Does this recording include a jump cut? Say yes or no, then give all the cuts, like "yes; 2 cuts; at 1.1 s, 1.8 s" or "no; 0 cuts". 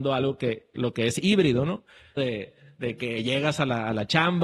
yes; 1 cut; at 2.2 s